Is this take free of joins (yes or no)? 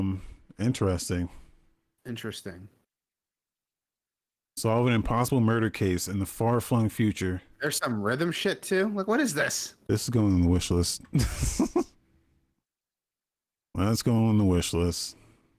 yes